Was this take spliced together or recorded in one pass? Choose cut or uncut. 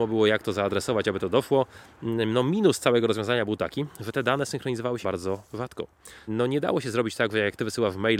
cut